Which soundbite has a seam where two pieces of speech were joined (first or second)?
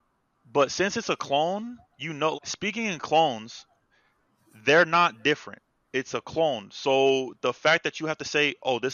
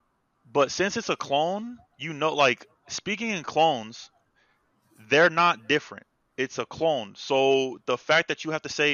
first